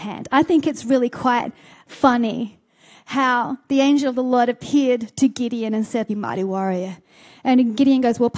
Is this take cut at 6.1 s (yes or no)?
yes